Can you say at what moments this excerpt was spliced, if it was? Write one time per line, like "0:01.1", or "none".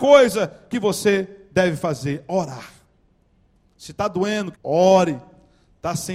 0:04.5